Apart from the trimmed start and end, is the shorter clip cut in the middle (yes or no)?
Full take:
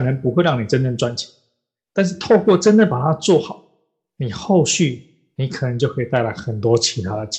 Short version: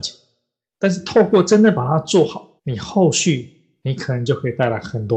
yes